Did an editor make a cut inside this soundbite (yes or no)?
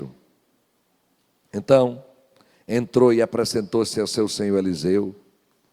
no